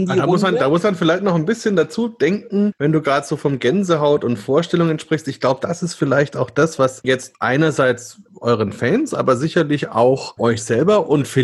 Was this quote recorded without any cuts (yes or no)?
no